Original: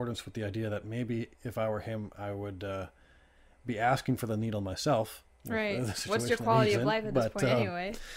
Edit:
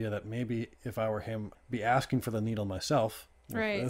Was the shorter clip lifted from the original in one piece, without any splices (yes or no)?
no